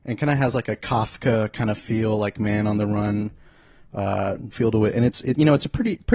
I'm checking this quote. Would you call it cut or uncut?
cut